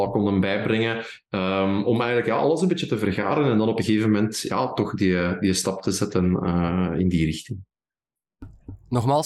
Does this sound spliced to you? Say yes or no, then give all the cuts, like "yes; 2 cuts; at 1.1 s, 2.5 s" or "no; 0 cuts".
no; 0 cuts